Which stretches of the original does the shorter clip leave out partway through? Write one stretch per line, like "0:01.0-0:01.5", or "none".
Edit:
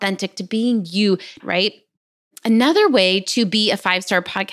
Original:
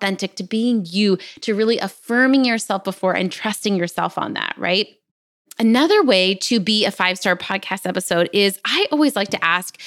0:01.4-0:04.5